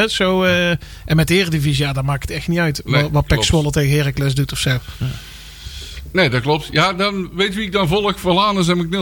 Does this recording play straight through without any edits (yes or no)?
yes